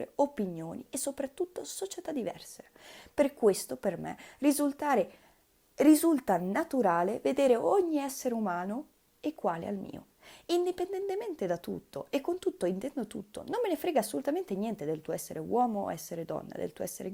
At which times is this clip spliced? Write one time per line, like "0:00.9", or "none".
none